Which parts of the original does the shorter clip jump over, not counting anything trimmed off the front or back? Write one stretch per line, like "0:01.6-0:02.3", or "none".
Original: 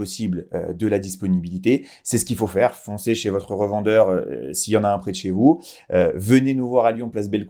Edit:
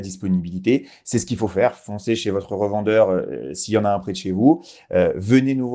none